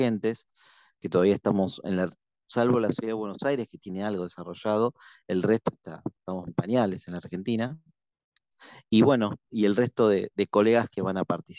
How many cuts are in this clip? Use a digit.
1